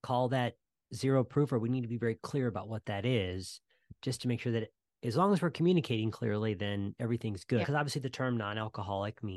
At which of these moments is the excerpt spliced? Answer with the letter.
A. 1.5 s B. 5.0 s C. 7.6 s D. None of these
C